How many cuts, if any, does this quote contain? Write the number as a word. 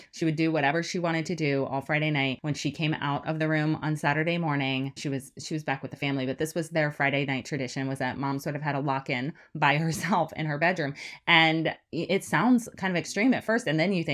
one